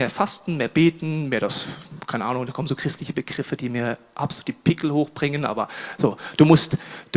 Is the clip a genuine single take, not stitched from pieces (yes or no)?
yes